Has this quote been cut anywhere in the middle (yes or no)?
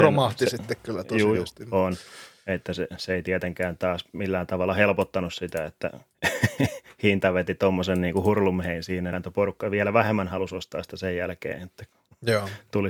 yes